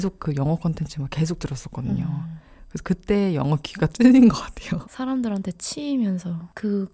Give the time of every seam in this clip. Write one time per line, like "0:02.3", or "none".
0:04.8